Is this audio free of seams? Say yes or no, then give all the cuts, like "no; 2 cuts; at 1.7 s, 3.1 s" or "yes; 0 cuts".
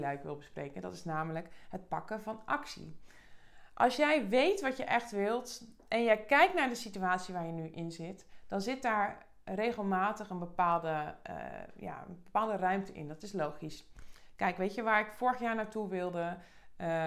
yes; 0 cuts